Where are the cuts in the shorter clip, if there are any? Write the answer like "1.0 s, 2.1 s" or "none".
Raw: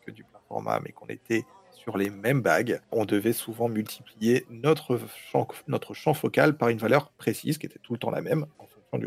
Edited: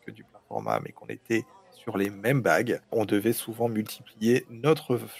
none